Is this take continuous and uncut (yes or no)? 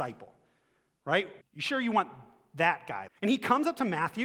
no